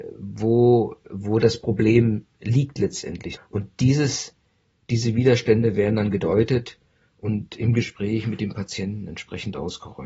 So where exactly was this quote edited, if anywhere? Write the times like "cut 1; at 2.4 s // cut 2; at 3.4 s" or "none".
cut 1; at 3.4 s